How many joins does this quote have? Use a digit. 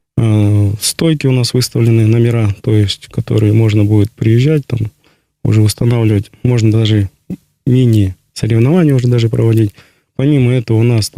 0